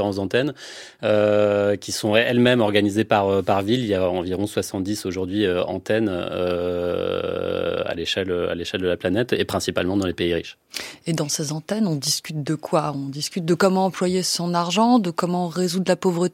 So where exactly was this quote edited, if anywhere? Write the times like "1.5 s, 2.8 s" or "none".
none